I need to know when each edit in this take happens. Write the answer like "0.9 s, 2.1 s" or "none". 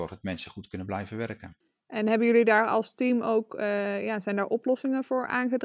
none

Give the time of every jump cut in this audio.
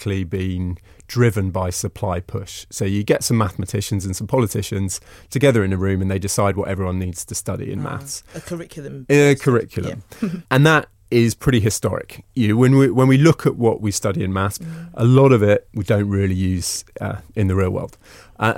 14.6 s

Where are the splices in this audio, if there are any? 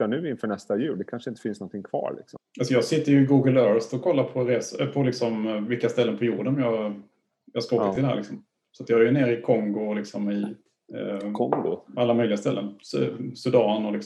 none

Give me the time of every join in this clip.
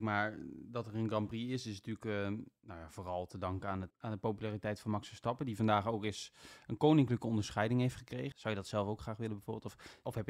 3.9 s, 8.3 s

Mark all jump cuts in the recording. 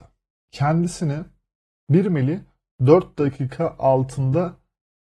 none

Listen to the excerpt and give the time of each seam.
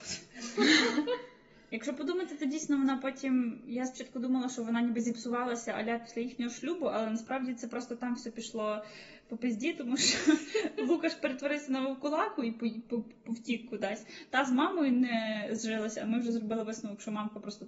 none

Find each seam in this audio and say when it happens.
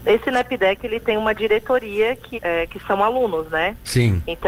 2.3 s

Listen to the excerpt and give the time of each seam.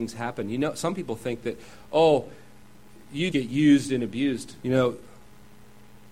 3.3 s, 4.6 s

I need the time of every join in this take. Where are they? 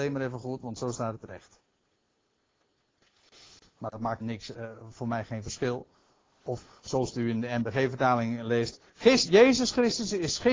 4.2 s

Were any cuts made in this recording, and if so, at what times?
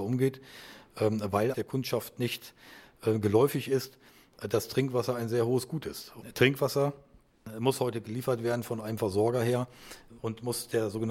1.5 s

